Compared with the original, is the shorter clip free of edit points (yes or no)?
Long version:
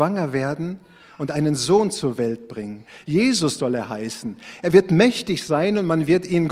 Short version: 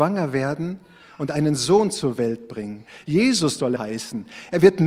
no